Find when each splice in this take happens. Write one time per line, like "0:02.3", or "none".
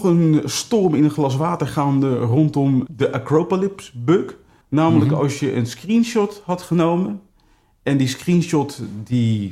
0:04.6